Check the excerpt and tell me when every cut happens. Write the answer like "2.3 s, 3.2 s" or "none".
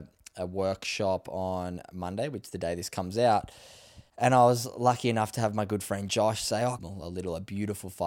4.1 s, 6.8 s